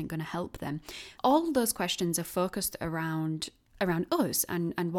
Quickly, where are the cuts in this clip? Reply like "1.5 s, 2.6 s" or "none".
1.1 s